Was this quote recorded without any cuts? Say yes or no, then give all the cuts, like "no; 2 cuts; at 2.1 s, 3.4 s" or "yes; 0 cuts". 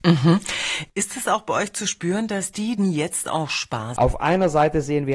no; 2 cuts; at 2.8 s, 4.0 s